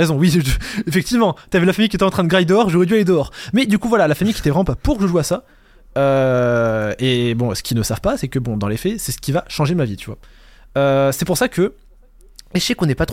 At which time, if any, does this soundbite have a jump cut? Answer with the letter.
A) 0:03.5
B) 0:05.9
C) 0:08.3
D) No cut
D